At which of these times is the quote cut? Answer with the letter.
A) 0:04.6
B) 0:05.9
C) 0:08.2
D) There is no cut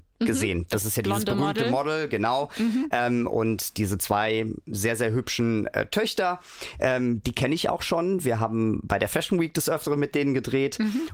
D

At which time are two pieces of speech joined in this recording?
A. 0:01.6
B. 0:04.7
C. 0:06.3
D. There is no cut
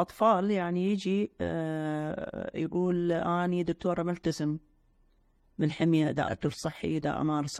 C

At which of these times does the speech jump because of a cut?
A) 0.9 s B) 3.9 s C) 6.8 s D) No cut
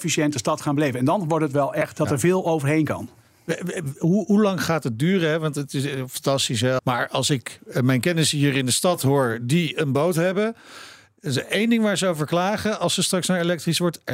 C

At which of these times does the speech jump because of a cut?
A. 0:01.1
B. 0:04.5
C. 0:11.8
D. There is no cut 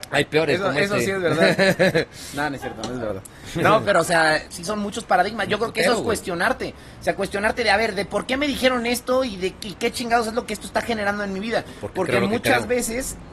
B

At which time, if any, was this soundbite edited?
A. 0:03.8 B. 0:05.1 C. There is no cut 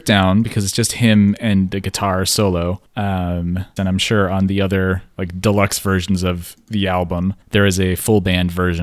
A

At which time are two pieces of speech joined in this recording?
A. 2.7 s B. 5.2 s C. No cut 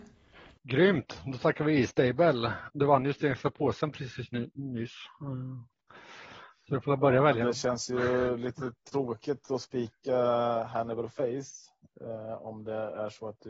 A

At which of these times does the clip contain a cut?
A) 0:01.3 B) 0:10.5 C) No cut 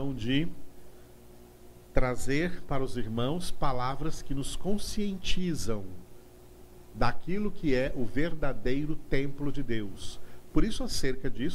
B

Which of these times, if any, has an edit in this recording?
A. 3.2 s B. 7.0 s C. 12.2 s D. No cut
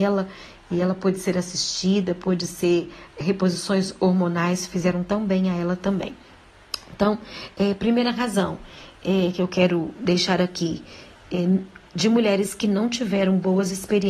A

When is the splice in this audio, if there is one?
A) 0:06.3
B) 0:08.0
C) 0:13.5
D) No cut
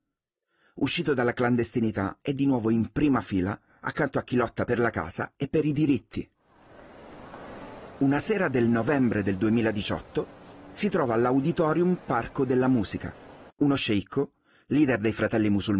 C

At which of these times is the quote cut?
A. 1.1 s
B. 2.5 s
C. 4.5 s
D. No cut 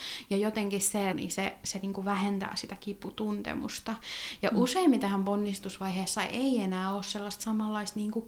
A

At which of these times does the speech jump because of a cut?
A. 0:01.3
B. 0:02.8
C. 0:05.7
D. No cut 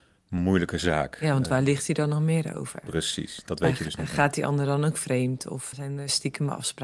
C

